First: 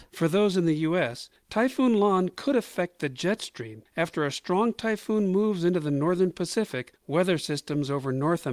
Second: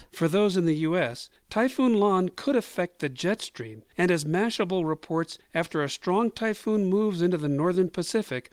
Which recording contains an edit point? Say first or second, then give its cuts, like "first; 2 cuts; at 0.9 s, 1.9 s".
first; 1 cut; at 3.9 s